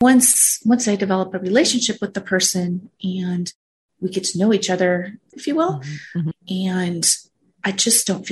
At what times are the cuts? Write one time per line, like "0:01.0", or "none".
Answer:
0:05.3
0:06.3